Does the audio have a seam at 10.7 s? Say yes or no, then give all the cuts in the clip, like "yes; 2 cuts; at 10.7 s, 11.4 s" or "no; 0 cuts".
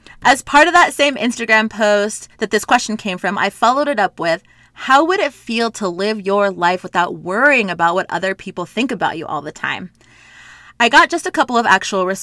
no; 0 cuts